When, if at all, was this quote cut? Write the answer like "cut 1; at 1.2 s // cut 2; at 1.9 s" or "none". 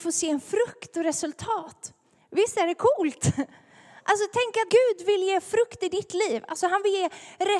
cut 1; at 4.7 s